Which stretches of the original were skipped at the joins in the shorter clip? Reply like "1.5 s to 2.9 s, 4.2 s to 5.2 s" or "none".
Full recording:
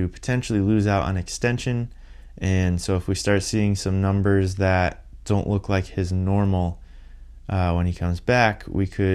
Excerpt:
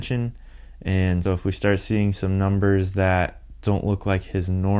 2.8 s to 2.9 s